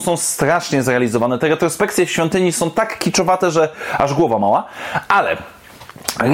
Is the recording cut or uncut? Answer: uncut